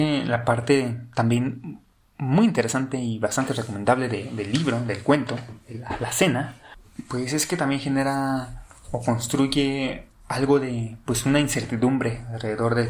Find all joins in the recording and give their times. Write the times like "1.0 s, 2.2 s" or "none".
none